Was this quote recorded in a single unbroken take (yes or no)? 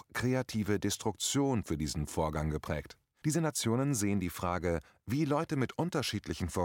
no